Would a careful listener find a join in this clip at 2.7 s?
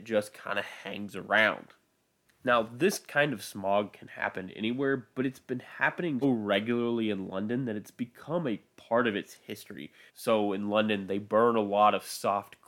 no; 2 cuts; at 6.2 s, 10.1 s

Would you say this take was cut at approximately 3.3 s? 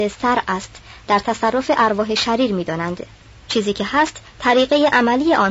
yes; 1 cut; at 3.3 s

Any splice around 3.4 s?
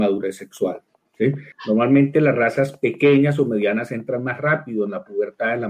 no; 1 cut; at 1.5 s

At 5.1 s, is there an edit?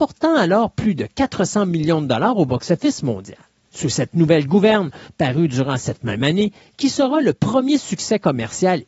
yes; 2 cuts; at 3.6 s, 5.1 s

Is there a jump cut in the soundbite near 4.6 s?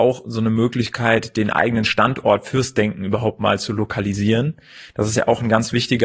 no; 0 cuts

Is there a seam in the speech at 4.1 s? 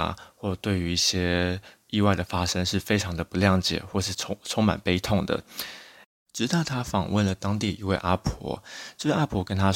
no; 0 cuts

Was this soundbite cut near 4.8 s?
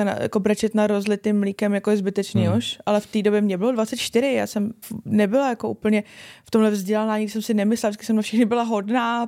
yes; 1 cut; at 4.8 s

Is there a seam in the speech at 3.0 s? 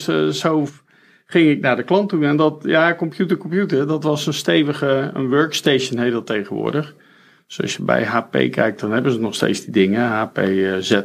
no; 0 cuts

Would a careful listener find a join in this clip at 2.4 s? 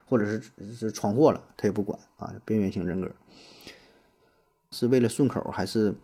no; 1 cut; at 4.7 s

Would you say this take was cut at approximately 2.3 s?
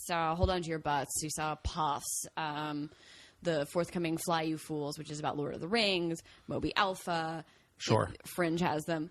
no; 1 cut; at 7.7 s

